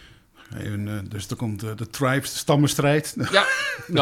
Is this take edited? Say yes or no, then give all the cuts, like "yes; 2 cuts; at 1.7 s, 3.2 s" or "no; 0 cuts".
no; 0 cuts